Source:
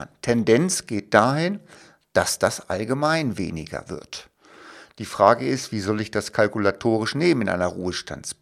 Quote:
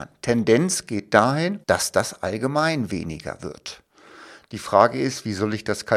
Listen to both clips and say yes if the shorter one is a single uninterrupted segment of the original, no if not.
no